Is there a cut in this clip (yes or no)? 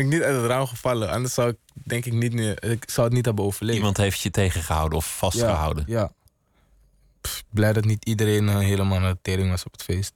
no